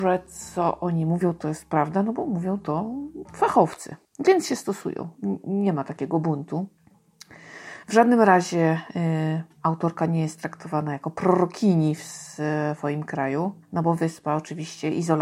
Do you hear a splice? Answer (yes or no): no